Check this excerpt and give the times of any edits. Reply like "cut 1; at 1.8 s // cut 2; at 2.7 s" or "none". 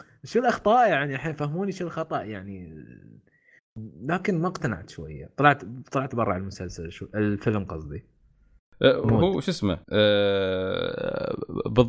cut 1; at 9.8 s